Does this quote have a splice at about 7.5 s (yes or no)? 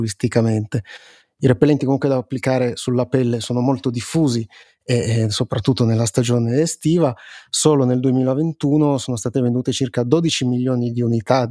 no